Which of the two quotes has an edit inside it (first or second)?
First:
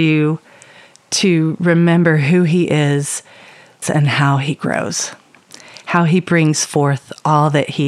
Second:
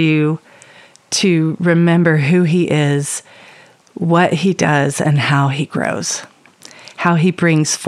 first